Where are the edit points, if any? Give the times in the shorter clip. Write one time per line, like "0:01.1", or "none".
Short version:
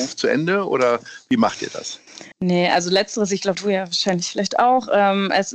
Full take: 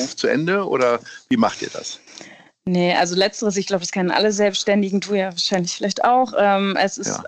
0:02.3
0:03.6